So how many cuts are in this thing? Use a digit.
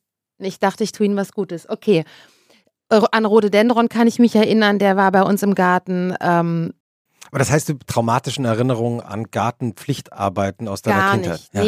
1